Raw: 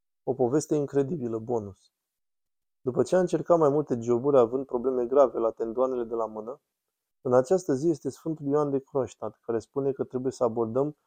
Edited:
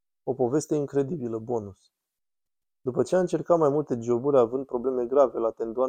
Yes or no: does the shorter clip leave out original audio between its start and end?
no